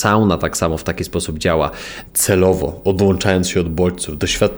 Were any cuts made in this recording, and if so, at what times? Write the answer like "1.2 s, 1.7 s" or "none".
2.0 s